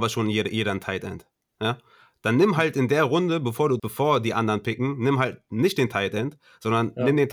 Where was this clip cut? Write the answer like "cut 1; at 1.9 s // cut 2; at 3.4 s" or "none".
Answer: cut 1; at 3.8 s